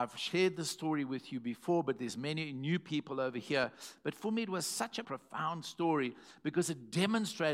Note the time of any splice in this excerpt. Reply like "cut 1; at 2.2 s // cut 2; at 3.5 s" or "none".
cut 1; at 5.0 s

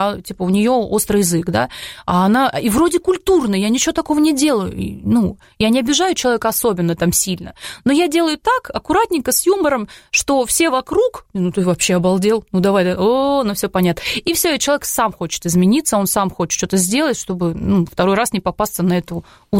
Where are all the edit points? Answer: none

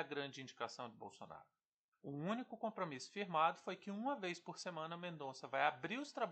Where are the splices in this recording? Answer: cut 1; at 1.9 s

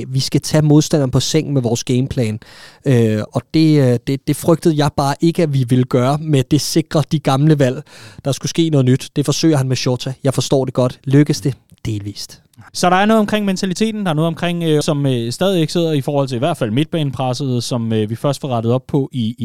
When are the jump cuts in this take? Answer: cut 1; at 12.7 s // cut 2; at 14.8 s

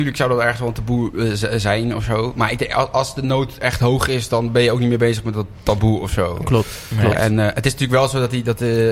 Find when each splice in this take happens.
none

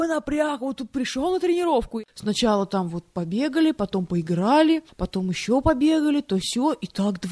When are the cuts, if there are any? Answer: none

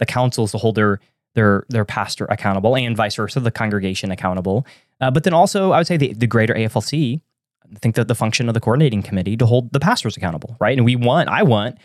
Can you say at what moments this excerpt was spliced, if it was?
none

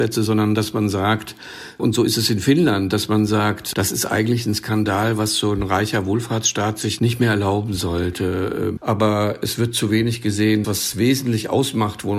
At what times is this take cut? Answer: cut 1; at 8.8 s // cut 2; at 10.6 s

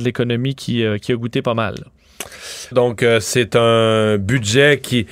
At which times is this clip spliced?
cut 1; at 2.7 s

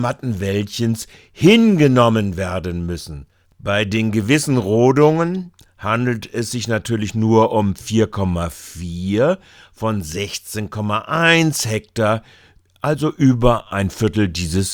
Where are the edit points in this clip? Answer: cut 1; at 3.4 s

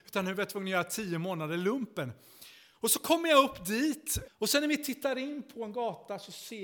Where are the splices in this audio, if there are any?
cut 1; at 2.7 s // cut 2; at 4.2 s

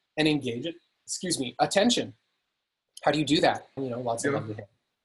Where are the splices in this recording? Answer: cut 1; at 3.8 s

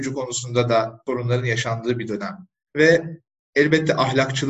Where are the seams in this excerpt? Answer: cut 1; at 2.7 s

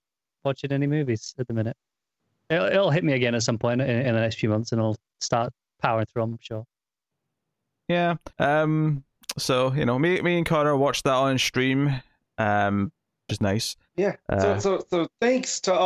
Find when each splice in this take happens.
cut 1; at 8.3 s // cut 2; at 13.3 s

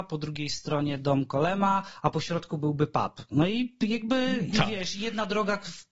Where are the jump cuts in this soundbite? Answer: none

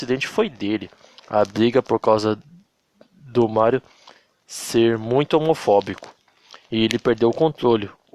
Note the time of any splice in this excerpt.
none

